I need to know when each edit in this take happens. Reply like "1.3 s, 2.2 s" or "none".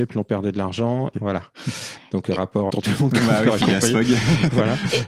1.1 s, 2.7 s